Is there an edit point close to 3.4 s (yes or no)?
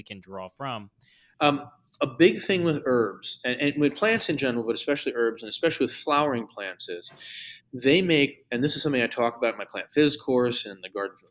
no